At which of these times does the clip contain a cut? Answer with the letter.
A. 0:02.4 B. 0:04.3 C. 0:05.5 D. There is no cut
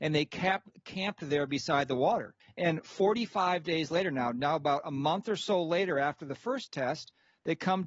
A